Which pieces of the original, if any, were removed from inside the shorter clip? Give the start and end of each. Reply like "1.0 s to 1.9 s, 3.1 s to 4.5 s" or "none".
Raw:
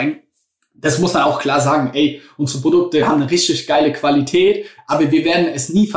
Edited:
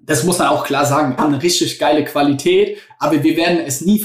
1.9 s to 3.1 s